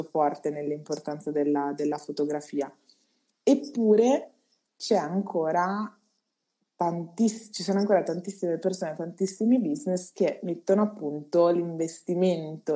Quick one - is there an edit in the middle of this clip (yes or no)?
no